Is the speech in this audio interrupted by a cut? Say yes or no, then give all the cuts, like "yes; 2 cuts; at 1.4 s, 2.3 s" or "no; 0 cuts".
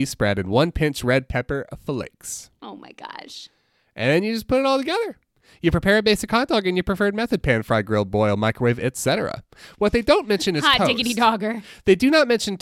no; 0 cuts